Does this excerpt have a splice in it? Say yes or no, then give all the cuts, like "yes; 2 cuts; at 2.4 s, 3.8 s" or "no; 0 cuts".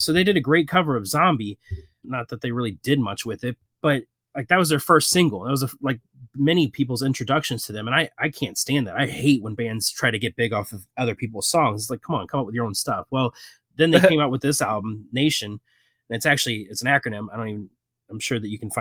no; 0 cuts